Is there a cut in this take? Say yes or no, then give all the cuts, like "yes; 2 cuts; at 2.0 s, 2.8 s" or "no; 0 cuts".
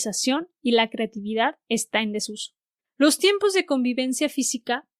yes; 1 cut; at 2.8 s